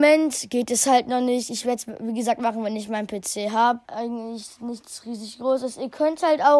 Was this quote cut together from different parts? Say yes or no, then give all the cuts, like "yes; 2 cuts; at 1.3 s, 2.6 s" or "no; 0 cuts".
yes; 1 cut; at 3.9 s